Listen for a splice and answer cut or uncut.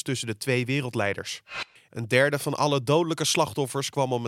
cut